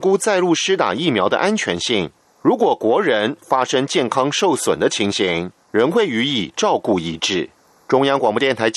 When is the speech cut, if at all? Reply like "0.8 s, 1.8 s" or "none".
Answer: 2.3 s, 5.6 s